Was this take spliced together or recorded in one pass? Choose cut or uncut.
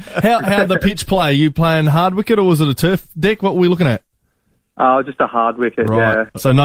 uncut